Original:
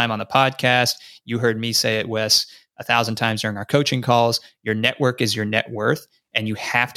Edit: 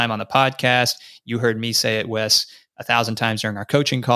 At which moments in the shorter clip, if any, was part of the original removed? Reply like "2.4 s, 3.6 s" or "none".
none